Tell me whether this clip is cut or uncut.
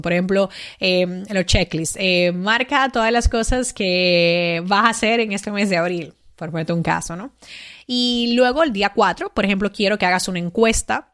uncut